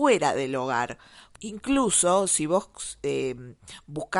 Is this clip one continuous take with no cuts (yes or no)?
no